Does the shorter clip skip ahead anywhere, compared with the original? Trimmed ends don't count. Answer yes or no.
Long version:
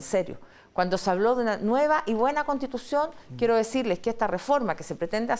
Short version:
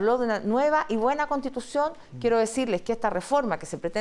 no